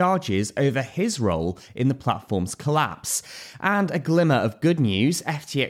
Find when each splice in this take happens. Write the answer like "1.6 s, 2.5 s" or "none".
none

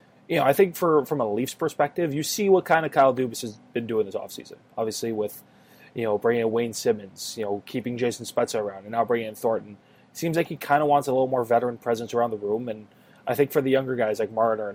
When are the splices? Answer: none

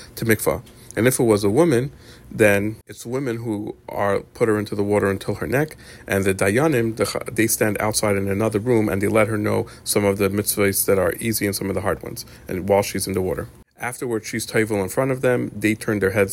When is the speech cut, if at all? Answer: none

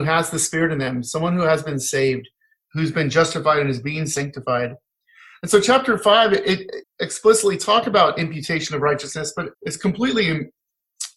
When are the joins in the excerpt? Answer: 6.8 s, 9.5 s

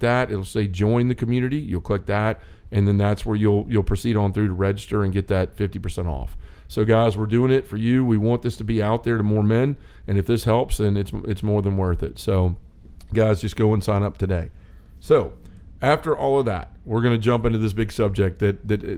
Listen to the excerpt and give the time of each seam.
none

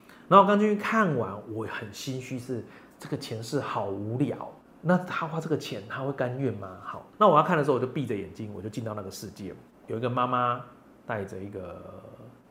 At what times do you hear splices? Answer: 7.1 s, 9.8 s

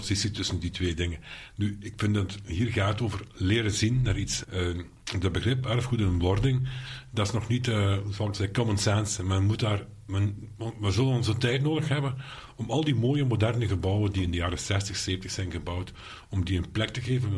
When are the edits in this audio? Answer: 4.4 s

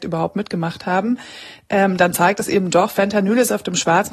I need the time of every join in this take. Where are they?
none

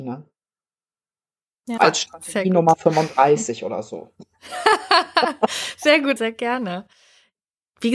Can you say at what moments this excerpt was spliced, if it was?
1.8 s, 6.2 s

